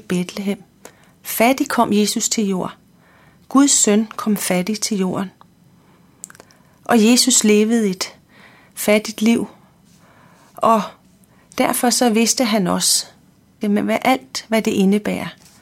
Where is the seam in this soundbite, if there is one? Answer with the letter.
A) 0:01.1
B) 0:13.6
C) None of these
B